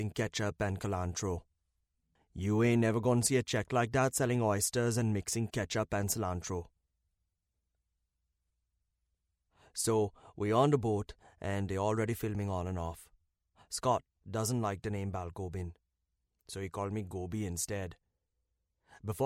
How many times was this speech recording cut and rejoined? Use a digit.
1